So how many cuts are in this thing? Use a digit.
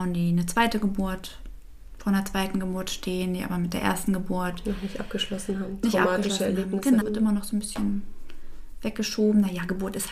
1